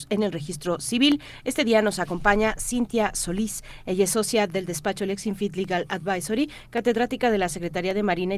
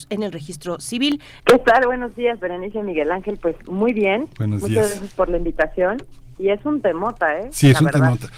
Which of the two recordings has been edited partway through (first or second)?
second